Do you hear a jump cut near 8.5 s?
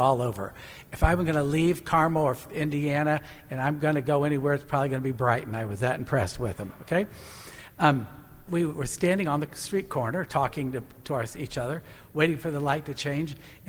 yes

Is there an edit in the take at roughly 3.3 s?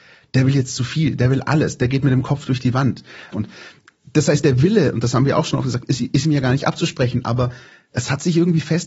yes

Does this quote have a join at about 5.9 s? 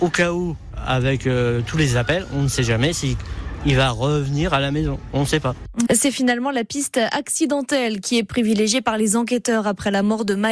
yes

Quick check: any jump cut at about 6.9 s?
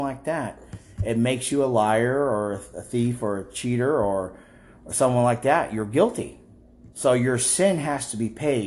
yes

